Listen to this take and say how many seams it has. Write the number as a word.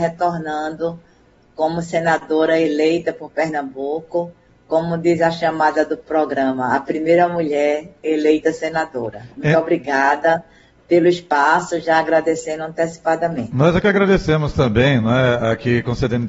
zero